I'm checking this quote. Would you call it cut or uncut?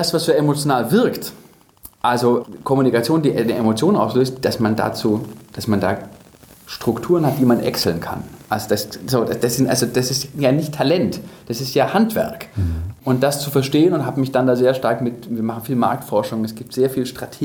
uncut